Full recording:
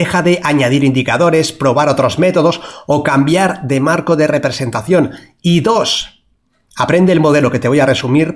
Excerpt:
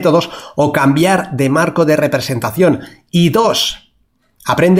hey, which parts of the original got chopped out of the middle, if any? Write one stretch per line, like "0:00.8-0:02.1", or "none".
none